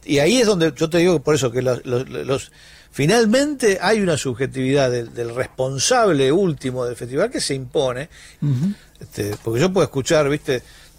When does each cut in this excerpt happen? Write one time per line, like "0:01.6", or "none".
0:08.4